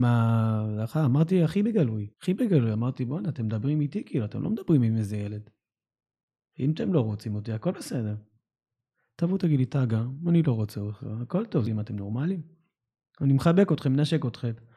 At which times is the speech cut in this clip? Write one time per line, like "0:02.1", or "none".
0:02.1
0:11.7

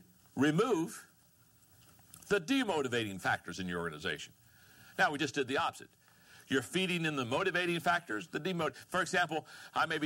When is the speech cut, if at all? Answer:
none

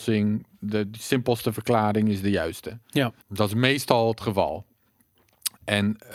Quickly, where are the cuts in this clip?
0:03.2

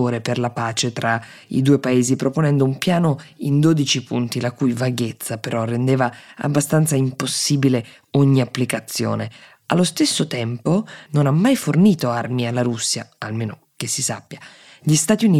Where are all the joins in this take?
0:11.1

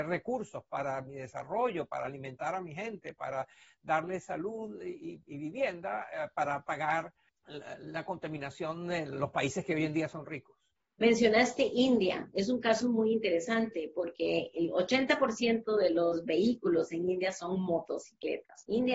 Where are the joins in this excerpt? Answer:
none

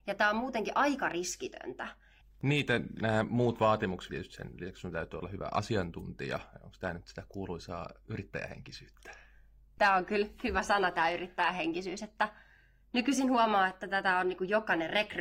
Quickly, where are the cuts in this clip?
0:02.2
0:04.1

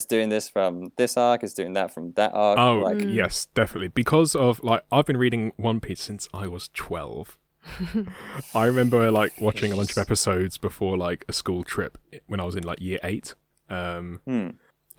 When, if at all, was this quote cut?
none

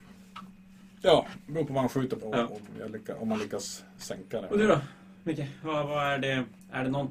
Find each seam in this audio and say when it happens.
0:02.2

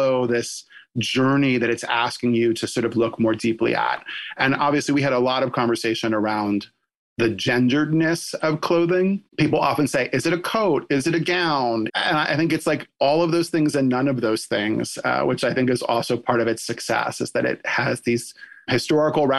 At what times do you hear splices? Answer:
0:09.3
0:11.9

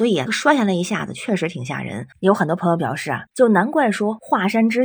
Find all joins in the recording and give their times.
0:02.1
0:03.3

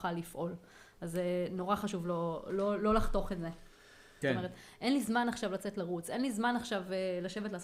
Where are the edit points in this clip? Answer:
0:04.2

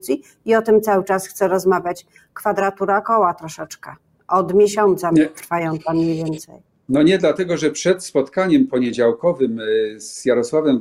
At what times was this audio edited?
none

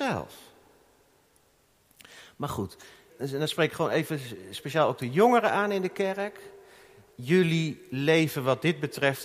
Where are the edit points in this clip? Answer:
0:03.1

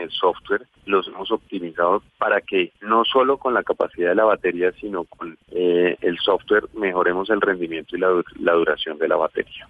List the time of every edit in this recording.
none

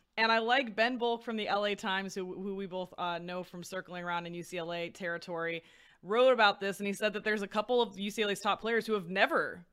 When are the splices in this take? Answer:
none

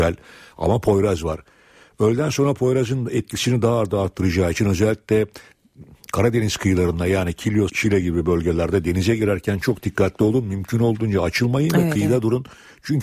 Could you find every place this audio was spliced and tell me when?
0:07.7

